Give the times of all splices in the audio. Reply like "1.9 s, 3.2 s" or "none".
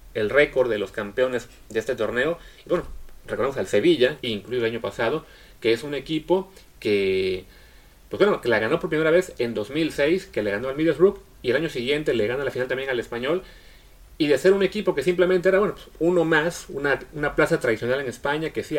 4.2 s